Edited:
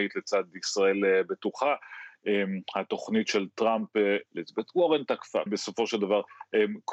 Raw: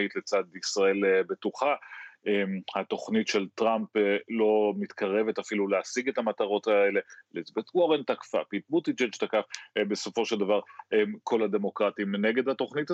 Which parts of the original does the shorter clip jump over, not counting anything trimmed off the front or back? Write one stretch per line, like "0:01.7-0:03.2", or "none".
0:04.3-0:07.2
0:08.5-0:09.8

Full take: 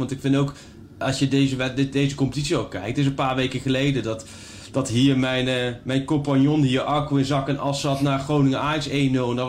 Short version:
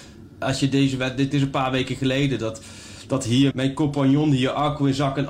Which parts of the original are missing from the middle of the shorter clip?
0:01.9-0:02.9
0:05.1-0:05.8

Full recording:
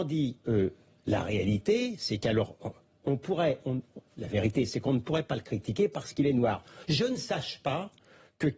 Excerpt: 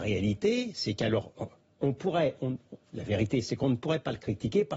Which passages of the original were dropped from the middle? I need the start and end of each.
none

